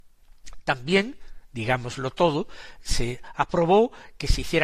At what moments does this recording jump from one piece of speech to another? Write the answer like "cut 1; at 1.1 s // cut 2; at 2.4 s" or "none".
none